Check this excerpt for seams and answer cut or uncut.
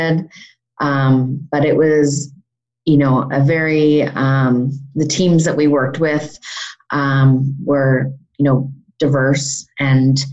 uncut